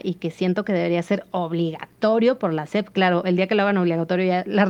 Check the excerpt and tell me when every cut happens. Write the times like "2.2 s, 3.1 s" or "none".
none